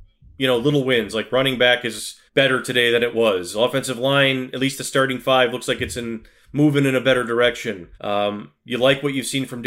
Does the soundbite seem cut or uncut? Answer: cut